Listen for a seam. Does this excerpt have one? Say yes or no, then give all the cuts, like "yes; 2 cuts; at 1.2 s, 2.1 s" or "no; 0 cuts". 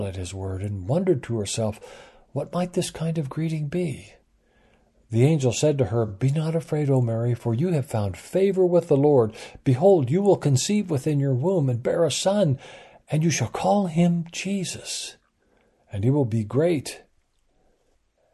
no; 0 cuts